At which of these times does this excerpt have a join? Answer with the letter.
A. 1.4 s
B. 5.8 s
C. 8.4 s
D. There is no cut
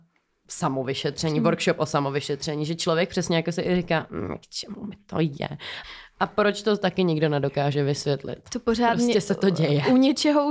B